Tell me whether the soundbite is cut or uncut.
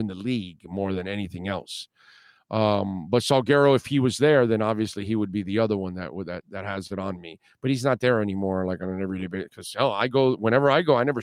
uncut